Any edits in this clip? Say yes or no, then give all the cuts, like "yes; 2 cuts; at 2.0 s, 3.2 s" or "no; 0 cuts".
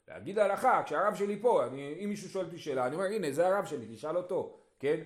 no; 0 cuts